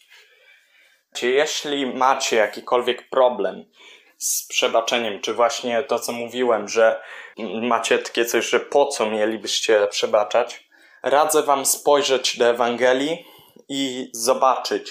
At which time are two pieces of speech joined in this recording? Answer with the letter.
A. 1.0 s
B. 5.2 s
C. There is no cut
C